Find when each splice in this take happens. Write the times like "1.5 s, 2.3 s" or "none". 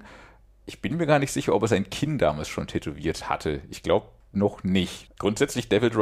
5.1 s

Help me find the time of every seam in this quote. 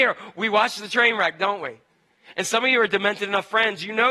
none

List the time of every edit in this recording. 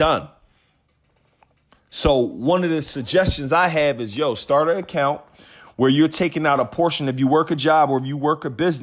none

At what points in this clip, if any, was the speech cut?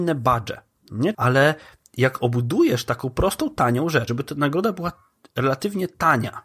1.1 s, 4.1 s

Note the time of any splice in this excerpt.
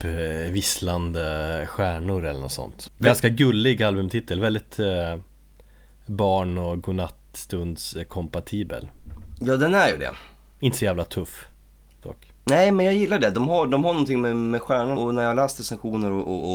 2.9 s, 15.0 s

